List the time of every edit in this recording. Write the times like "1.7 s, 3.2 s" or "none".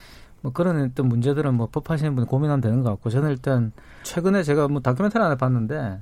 4.0 s

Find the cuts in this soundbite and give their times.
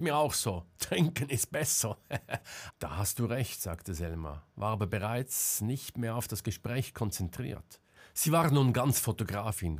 2.7 s

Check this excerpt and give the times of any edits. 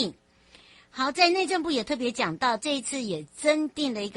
none

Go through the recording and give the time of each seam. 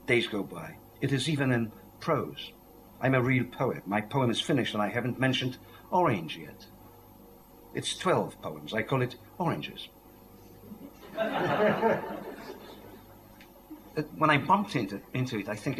10.9 s, 13.9 s

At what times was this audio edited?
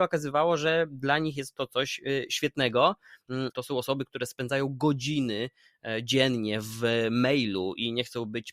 3.5 s

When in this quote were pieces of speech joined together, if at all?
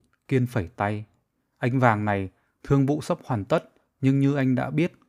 1.4 s

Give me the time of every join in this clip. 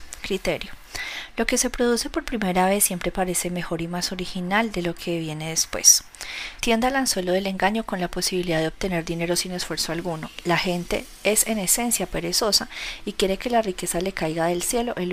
6.6 s

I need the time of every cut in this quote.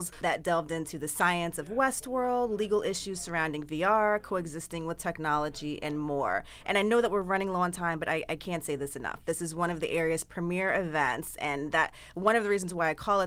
none

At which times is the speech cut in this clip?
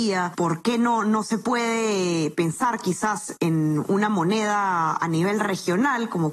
3.4 s

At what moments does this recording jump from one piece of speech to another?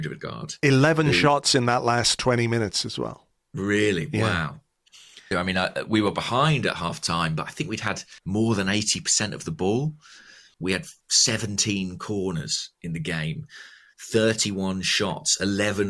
5.3 s, 8.2 s, 10.5 s

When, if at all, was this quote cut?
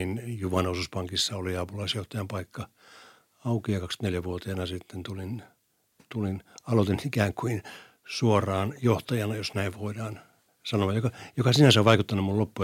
none

